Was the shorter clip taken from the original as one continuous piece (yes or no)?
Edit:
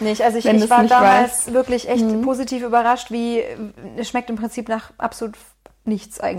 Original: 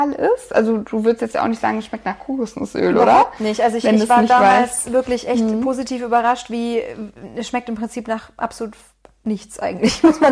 yes